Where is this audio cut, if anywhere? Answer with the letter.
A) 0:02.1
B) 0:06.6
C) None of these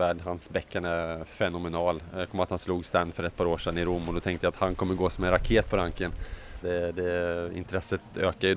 B